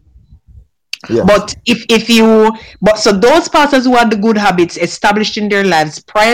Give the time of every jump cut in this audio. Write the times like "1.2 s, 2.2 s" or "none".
none